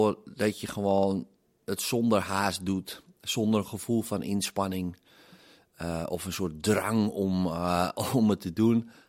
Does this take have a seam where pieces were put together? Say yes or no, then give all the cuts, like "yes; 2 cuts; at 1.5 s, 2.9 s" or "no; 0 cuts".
no; 0 cuts